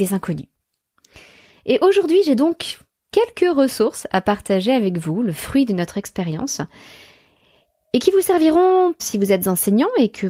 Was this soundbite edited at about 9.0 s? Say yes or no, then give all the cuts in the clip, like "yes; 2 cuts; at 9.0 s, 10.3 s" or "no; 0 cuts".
yes; 1 cut; at 9.0 s